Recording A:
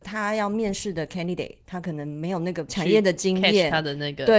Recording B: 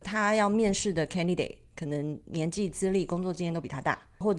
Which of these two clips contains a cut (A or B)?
A